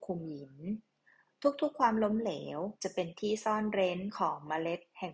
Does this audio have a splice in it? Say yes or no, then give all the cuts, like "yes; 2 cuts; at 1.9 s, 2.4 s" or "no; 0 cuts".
yes; 1 cut; at 2.8 s